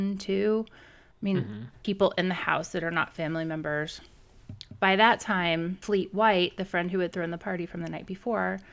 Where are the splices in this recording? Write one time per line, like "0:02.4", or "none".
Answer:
0:01.7